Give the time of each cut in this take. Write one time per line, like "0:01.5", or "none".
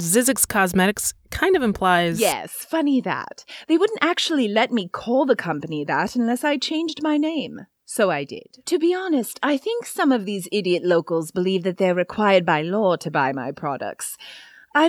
0:08.6